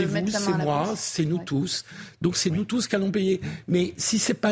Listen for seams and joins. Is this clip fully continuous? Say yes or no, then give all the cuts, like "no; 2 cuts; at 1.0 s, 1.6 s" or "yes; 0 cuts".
yes; 0 cuts